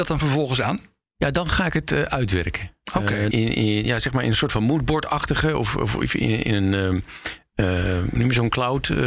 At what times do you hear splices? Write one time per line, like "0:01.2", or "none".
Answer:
0:03.3
0:08.2

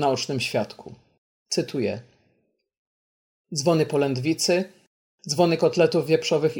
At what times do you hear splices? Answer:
none

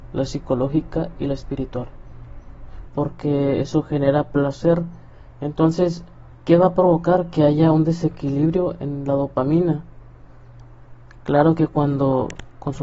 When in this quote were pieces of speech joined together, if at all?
0:02.9

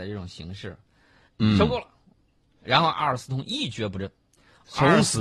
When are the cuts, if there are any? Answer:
0:01.3

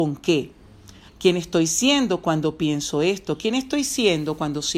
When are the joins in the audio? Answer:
0:01.1

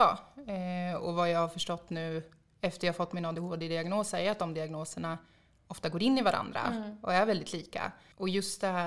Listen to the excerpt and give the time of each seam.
none

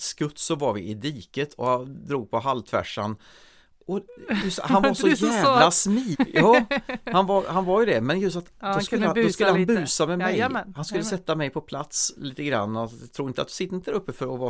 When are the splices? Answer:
0:06.1

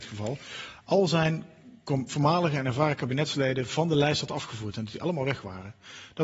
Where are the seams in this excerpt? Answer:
none

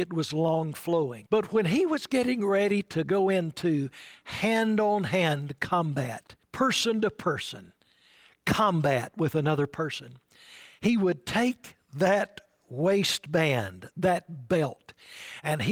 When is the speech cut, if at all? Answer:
0:01.3
0:06.4

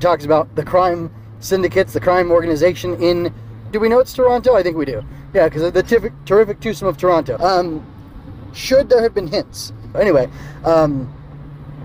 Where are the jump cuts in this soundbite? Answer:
0:03.7
0:07.4
0:09.9

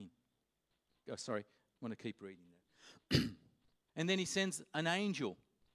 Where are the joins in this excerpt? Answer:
0:01.1
0:03.9

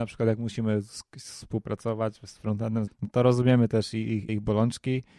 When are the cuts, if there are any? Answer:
0:02.9
0:04.3

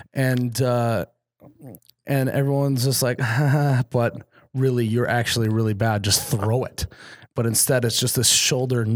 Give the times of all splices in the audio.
none

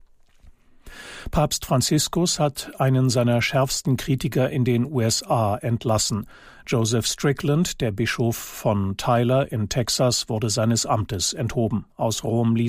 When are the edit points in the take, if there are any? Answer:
none

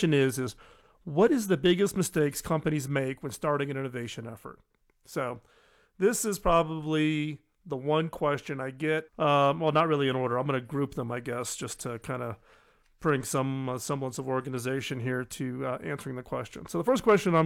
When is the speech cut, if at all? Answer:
0:09.1

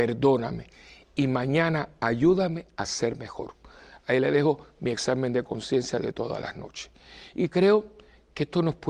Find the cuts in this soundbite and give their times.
none

